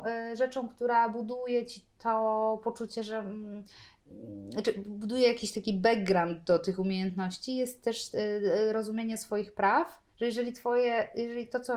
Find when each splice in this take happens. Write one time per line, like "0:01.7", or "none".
0:10.1

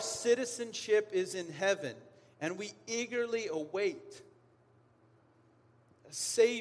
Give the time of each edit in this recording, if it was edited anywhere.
none

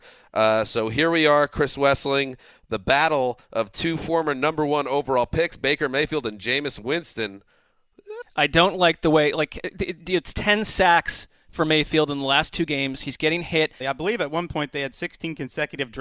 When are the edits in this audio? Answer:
0:08.2
0:13.8

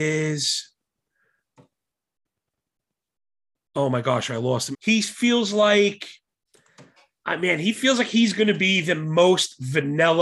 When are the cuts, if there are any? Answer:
0:04.7

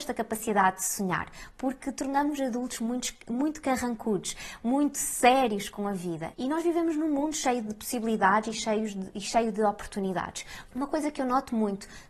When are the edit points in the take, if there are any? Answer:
0:06.3
0:10.7

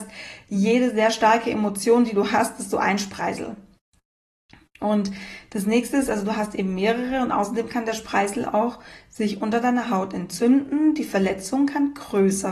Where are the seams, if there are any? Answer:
none

